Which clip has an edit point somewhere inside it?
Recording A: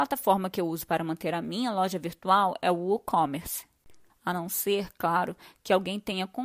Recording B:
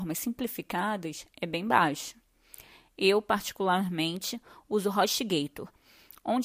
A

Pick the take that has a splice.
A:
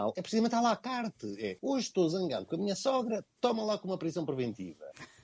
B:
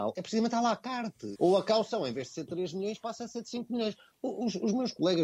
B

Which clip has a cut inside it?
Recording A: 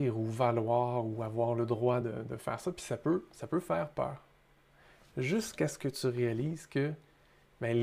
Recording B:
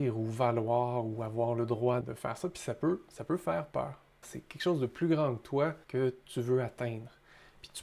B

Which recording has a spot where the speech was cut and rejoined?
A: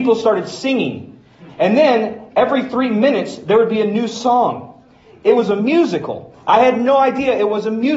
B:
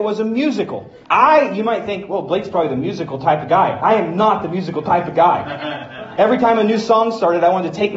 B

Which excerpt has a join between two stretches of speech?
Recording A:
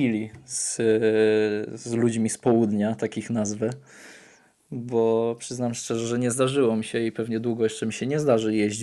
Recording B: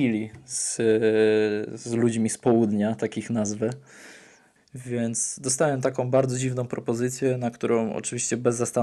B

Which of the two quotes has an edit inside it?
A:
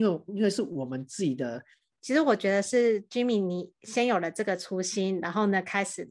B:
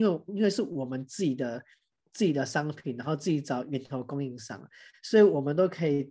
A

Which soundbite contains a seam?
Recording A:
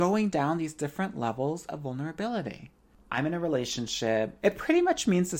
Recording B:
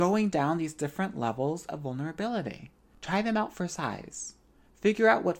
A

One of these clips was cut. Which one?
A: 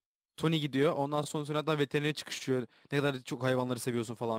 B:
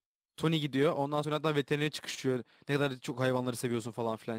B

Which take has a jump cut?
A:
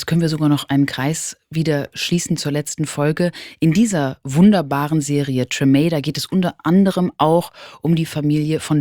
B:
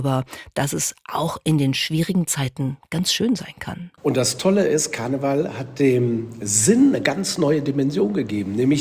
B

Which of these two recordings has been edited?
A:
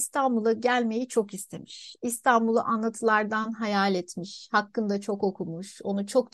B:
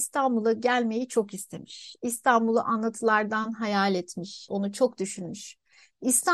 B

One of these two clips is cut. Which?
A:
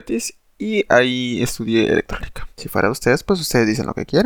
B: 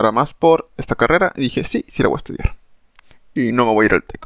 A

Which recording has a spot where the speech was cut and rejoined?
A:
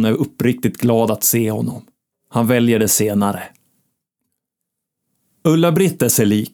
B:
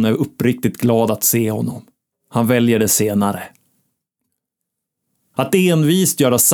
B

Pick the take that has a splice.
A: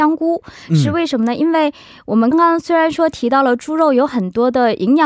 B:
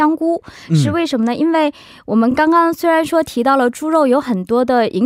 A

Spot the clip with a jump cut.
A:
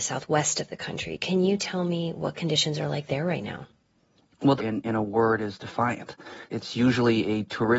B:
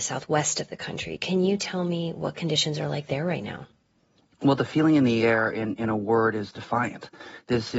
A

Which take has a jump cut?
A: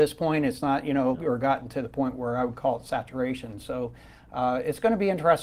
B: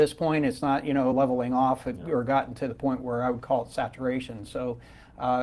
A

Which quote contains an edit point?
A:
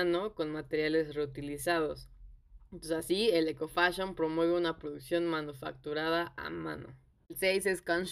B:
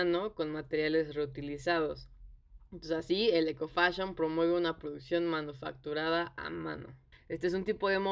B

